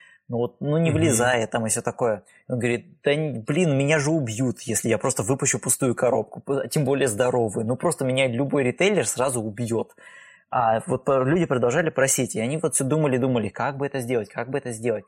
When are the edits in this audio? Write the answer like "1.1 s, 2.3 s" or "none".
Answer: 10.4 s

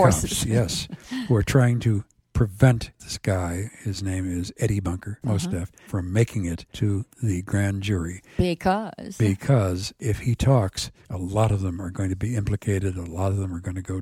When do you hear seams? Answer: 5.2 s

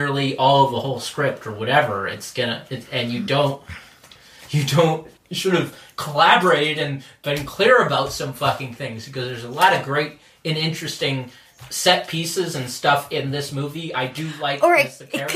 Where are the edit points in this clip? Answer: 5.2 s

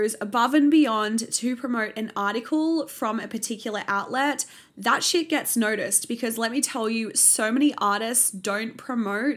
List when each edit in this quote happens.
none

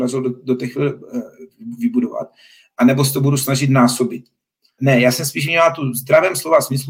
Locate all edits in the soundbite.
4.8 s

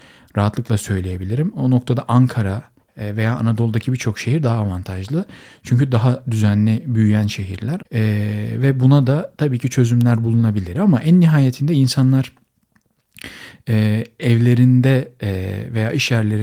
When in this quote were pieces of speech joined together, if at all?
7.8 s, 10.7 s

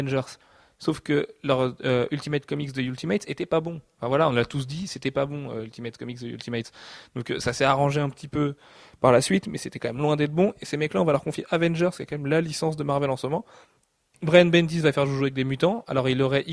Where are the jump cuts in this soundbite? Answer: none

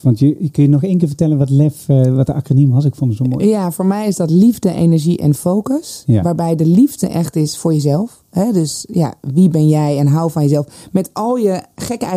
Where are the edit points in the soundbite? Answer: none

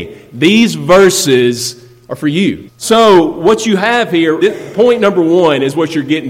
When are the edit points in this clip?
2.7 s, 4.4 s

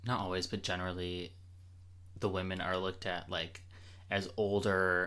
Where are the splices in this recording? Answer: none

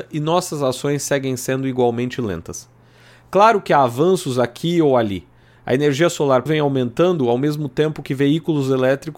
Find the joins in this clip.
6.5 s

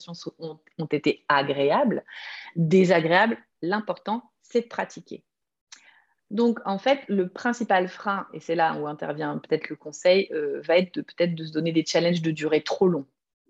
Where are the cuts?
none

